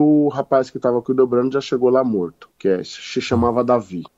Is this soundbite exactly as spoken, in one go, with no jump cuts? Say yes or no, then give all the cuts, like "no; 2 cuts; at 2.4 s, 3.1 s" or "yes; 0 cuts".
no; 1 cut; at 2.5 s